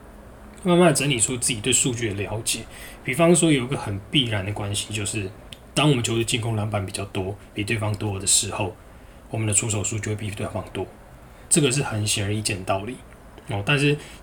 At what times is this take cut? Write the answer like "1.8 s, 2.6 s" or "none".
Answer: 11.5 s